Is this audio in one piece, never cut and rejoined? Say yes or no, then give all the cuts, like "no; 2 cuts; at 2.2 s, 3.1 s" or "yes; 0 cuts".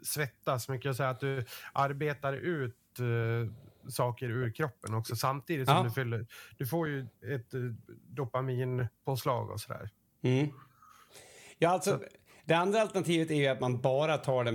yes; 0 cuts